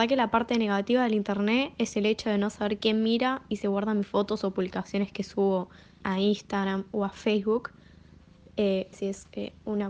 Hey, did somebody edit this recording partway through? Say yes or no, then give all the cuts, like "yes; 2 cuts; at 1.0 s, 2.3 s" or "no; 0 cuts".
yes; 2 cuts; at 6.0 s, 8.9 s